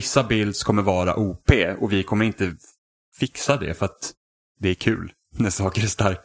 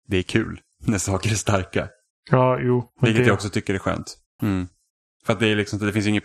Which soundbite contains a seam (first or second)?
second